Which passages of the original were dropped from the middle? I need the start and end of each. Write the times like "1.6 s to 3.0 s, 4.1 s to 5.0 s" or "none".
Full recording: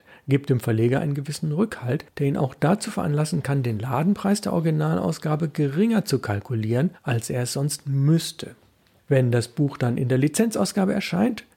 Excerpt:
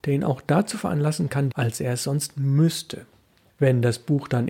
3.6 s to 7.0 s